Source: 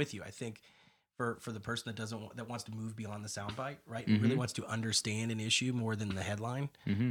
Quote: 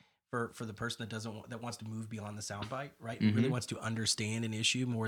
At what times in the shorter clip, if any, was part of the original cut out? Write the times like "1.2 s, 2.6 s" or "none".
none